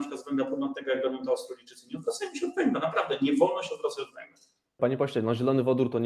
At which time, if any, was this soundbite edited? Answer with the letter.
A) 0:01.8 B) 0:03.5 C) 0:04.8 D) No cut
C